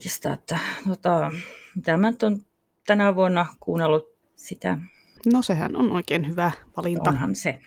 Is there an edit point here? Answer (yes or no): yes